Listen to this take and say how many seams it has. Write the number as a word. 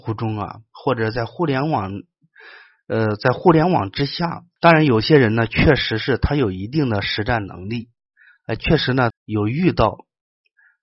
two